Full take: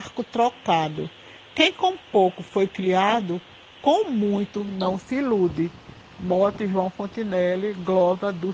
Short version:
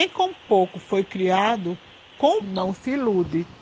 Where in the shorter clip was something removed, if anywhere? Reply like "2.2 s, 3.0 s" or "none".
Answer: 2.4 s